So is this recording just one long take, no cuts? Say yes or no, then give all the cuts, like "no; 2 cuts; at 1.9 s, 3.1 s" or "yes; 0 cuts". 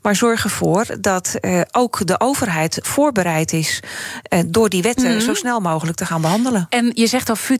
yes; 0 cuts